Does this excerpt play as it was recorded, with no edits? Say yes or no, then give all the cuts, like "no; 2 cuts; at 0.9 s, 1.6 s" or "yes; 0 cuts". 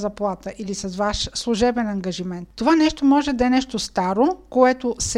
yes; 0 cuts